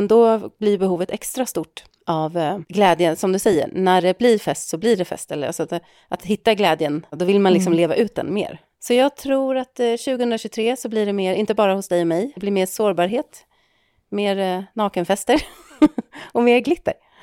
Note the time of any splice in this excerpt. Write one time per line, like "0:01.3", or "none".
none